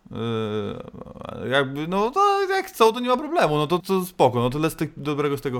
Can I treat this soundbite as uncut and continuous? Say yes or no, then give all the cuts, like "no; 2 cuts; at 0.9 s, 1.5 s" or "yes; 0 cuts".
no; 1 cut; at 3.8 s